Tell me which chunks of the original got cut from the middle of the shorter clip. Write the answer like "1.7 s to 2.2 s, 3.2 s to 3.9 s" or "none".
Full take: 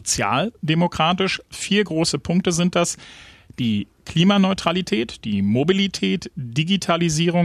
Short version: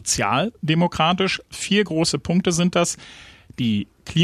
none